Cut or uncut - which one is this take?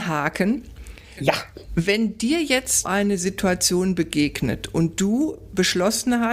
cut